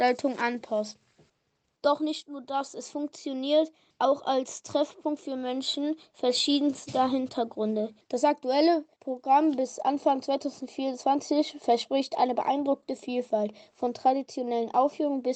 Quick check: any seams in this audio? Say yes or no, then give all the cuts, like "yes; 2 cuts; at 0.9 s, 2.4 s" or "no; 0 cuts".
yes; 2 cuts; at 1.8 s, 8.0 s